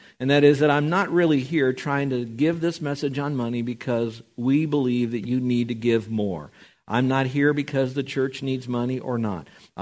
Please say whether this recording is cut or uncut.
uncut